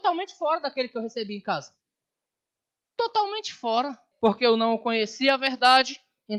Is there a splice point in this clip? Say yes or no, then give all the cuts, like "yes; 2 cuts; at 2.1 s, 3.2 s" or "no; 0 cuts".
yes; 1 cut; at 4.1 s